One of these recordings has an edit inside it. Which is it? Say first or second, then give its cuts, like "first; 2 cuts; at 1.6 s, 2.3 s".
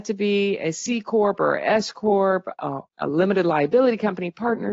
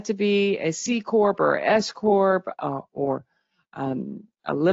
first; 1 cut; at 2.9 s